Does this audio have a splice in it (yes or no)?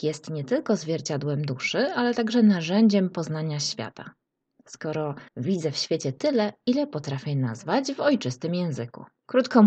yes